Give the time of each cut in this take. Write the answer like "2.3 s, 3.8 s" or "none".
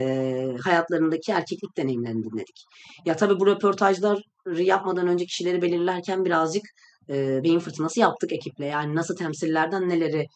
none